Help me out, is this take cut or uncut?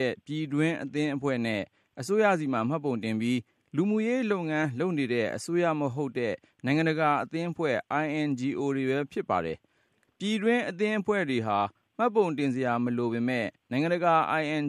uncut